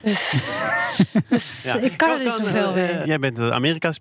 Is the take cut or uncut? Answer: cut